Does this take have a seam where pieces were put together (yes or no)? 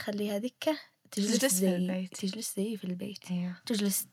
no